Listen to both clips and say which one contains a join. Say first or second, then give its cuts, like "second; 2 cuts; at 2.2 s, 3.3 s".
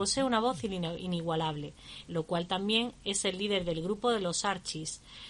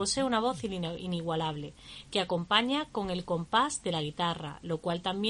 first; 1 cut; at 2.0 s